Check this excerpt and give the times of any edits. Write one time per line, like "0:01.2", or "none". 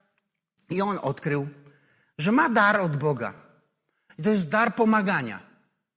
none

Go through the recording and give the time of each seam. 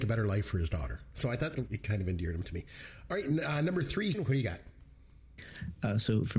0:04.1

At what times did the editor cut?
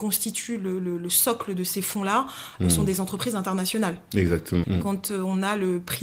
0:04.6

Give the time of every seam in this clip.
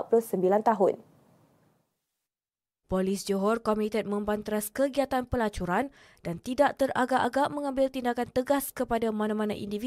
0:02.8

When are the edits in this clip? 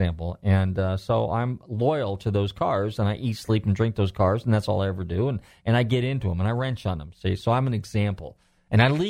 none

